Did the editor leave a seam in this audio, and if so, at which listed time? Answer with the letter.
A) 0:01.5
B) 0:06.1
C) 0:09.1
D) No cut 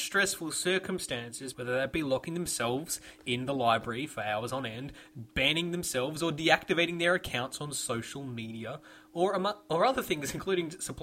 A